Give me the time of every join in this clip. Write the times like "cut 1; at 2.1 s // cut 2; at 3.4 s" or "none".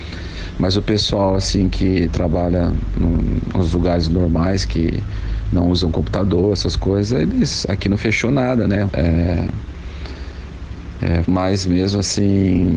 cut 1; at 8.9 s // cut 2; at 11.2 s

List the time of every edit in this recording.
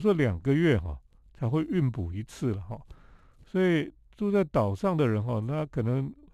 none

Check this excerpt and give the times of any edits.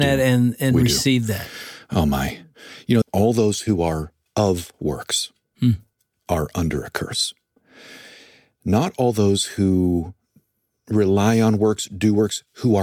cut 1; at 3.0 s

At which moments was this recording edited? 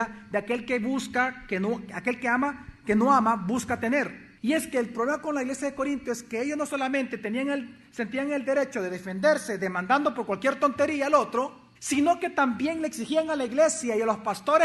cut 1; at 4.4 s // cut 2; at 11.7 s

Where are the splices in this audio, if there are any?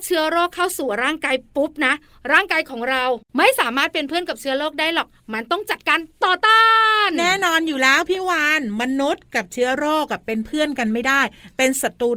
cut 1; at 3.3 s

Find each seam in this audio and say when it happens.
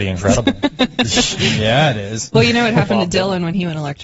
none

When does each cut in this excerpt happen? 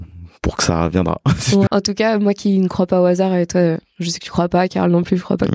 cut 1; at 1.7 s

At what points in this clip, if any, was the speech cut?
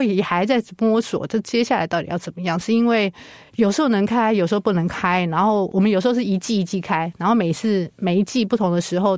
none

